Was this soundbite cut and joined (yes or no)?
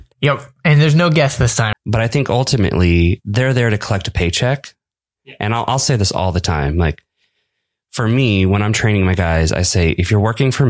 yes